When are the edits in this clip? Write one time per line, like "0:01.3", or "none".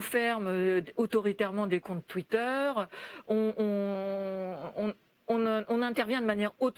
none